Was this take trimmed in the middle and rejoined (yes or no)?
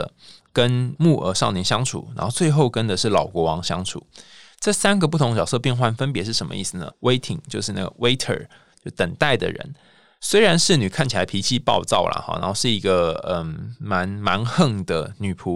yes